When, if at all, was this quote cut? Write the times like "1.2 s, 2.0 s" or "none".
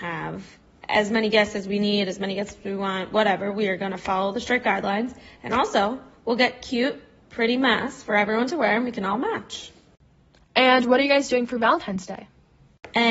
none

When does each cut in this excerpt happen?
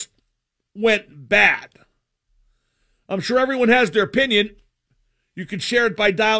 none

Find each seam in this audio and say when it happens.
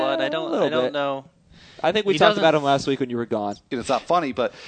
3.7 s

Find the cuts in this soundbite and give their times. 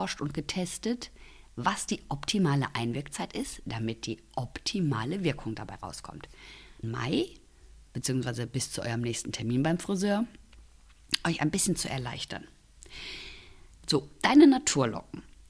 6.8 s, 13.8 s

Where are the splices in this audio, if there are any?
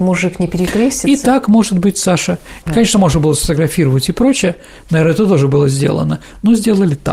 2.6 s

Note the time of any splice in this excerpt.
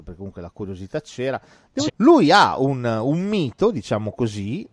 1.9 s

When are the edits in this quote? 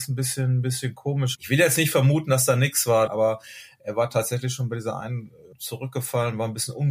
1.3 s, 3.1 s, 5.5 s

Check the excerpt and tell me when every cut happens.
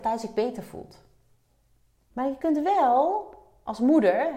2.1 s

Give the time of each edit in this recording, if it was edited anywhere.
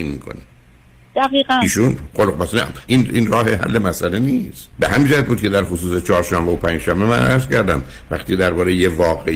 2.9 s, 4.7 s

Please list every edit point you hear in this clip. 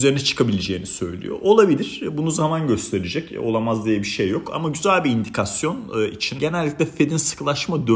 6.4 s

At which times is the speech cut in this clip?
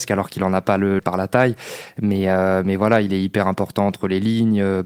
1.0 s

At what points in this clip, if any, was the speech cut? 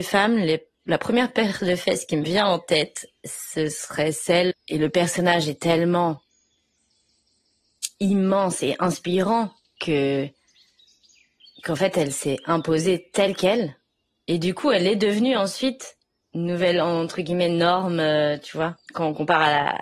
4.5 s

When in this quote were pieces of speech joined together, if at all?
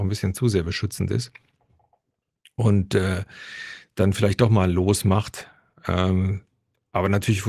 none

